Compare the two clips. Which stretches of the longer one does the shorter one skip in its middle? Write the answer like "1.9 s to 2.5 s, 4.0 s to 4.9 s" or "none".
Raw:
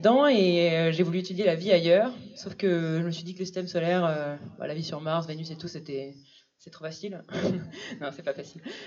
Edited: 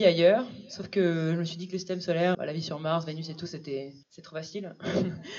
4.0 s to 4.6 s, 6.2 s to 6.5 s